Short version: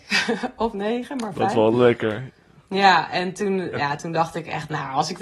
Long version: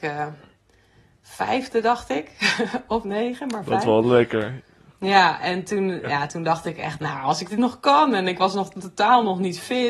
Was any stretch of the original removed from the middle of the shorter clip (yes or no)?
no